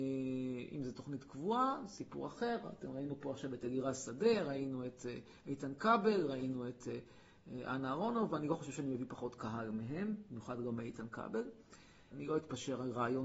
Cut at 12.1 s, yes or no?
yes